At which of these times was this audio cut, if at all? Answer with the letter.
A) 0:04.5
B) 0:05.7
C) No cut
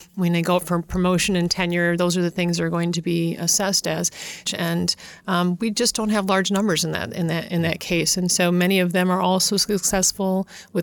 A